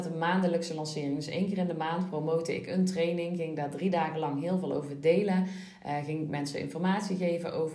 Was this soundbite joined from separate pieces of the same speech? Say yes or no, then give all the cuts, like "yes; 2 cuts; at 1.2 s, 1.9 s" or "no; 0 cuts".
no; 0 cuts